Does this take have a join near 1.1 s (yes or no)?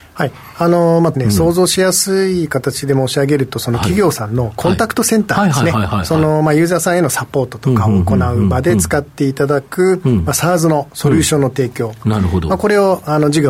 yes